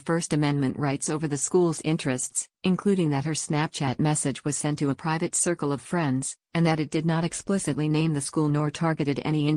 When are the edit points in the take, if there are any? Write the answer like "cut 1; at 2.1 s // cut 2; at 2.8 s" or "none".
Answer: none